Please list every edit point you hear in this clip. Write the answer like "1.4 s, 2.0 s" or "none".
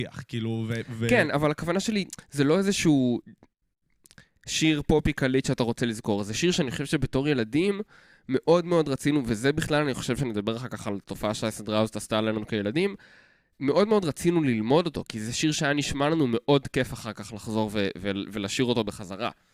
none